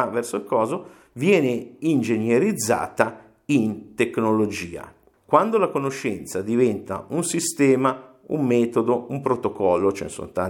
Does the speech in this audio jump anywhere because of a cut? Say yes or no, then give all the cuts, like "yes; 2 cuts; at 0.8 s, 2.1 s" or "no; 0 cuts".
yes; 1 cut; at 5.1 s